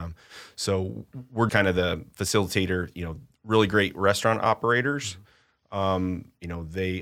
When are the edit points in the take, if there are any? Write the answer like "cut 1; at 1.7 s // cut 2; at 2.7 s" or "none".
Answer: cut 1; at 1.5 s